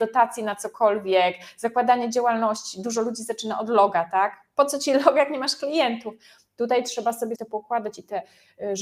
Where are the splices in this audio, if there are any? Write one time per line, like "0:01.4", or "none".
0:07.4